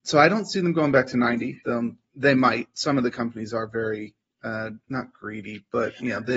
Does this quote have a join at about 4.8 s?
yes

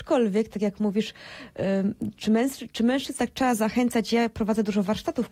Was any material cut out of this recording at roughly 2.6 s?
no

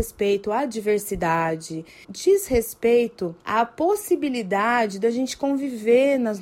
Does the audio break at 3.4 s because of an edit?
yes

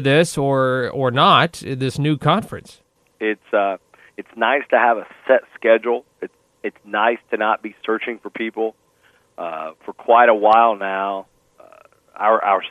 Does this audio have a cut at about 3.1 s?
yes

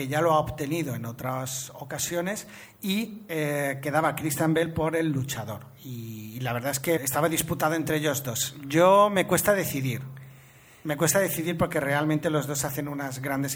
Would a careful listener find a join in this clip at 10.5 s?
no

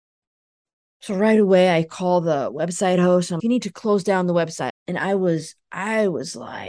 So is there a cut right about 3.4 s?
yes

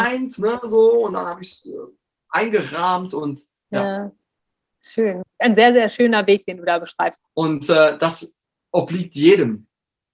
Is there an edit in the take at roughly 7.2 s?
yes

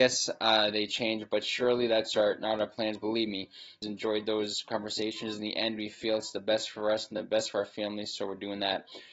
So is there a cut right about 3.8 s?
yes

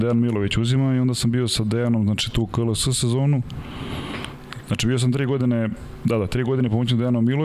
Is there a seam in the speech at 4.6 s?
yes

